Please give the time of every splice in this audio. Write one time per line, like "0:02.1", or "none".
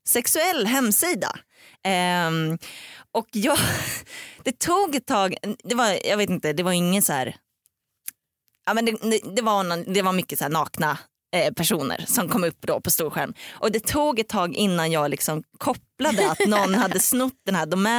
none